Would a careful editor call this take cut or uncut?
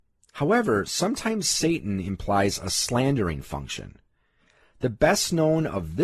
uncut